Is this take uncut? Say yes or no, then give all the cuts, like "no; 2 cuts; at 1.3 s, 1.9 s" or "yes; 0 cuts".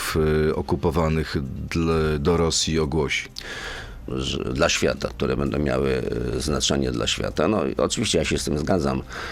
no; 2 cuts; at 4.1 s, 5.1 s